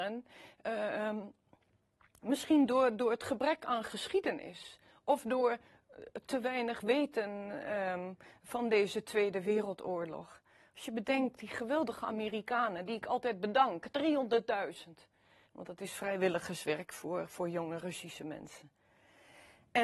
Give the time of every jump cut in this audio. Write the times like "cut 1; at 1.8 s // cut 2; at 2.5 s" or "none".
cut 1; at 15.5 s

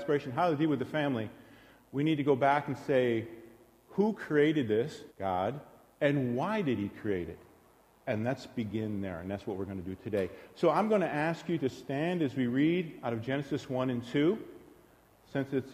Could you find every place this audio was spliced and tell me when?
cut 1; at 5.1 s

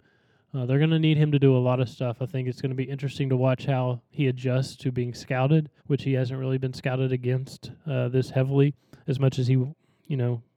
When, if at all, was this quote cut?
cut 1; at 5.8 s

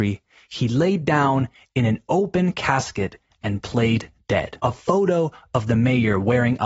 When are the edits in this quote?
cut 1; at 4.6 s

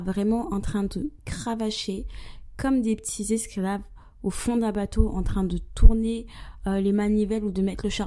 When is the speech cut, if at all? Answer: none

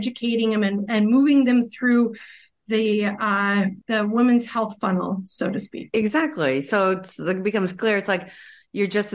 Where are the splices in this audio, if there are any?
cut 1; at 3.8 s

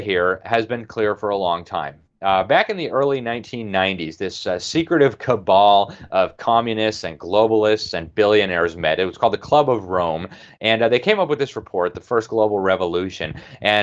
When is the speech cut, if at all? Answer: none

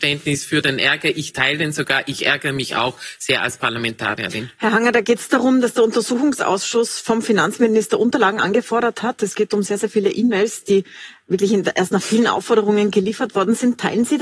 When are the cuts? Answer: none

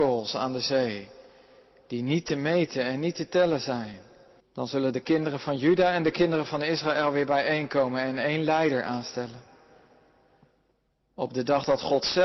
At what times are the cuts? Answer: cut 1; at 4.4 s

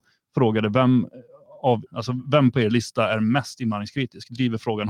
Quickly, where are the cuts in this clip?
cut 1; at 1.9 s

